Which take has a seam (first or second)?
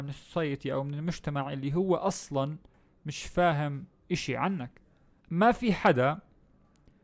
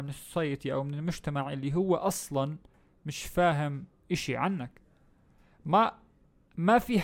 first